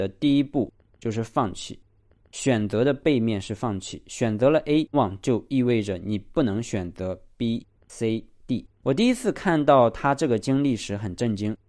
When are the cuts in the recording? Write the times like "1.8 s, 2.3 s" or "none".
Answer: 4.9 s, 8.8 s

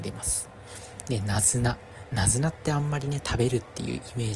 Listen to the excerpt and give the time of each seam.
none

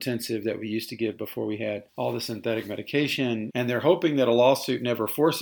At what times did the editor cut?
1.9 s, 3.5 s

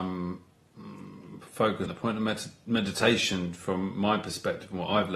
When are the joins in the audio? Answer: 1.9 s

